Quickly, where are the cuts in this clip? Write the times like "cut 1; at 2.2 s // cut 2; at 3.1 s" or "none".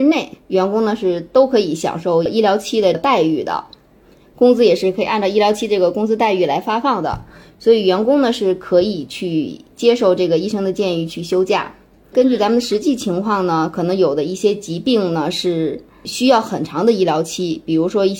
none